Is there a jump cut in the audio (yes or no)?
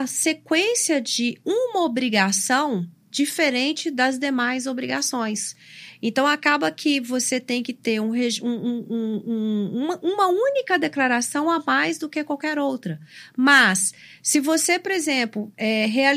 no